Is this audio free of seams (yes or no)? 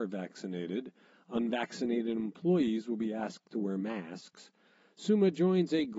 yes